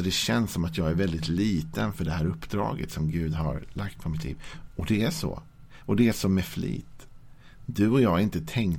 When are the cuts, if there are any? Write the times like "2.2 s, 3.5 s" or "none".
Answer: none